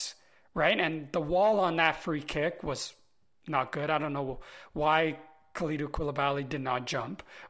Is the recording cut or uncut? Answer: uncut